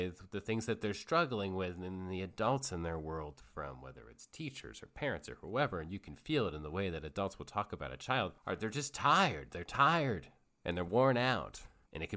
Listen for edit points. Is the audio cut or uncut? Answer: uncut